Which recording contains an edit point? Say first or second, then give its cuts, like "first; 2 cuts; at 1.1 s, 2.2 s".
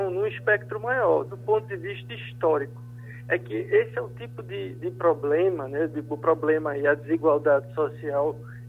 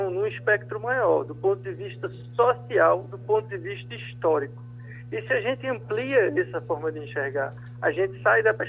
first; 2 cuts; at 1.3 s, 3.3 s